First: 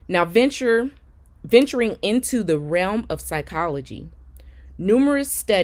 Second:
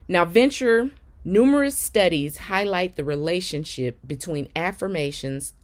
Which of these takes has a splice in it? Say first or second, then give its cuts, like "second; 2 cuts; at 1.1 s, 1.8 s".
second; 1 cut; at 1.2 s